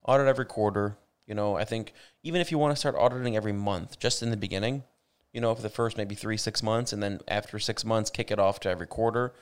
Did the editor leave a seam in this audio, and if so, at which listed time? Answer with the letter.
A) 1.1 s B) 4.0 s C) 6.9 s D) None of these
D